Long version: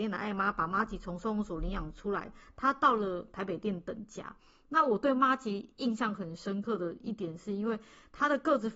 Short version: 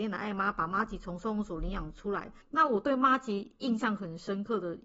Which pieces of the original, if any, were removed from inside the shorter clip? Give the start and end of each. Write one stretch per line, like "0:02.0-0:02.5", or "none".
0:02.4-0:04.6